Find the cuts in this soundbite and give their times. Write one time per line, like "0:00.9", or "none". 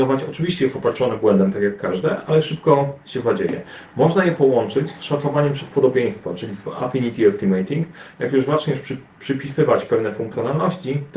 none